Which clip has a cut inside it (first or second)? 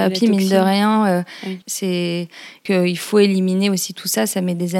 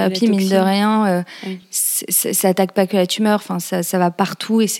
first